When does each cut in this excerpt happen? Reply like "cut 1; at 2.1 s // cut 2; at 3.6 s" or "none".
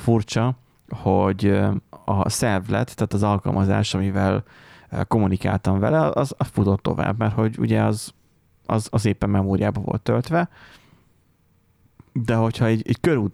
none